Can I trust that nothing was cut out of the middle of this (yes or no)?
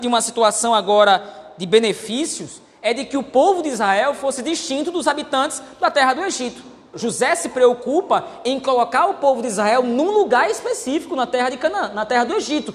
no